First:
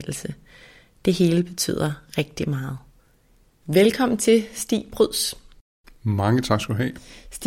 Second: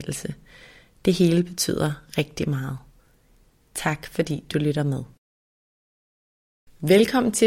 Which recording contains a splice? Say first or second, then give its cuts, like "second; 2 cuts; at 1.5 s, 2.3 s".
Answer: first; 1 cut; at 3.6 s